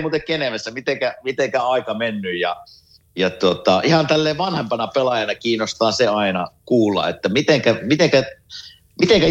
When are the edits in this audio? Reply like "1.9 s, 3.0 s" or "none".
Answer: none